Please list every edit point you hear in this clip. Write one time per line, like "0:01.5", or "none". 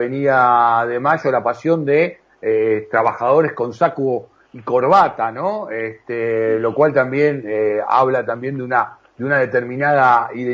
none